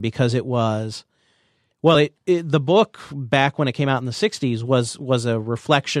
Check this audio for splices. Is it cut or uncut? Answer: uncut